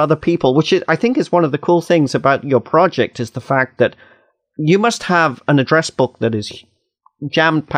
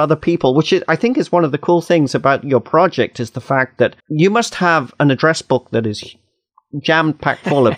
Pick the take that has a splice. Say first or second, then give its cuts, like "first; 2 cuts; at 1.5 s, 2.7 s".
second; 1 cut; at 4.0 s